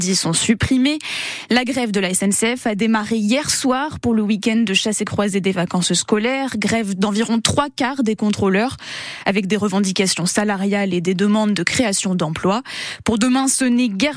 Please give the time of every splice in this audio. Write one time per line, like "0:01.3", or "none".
none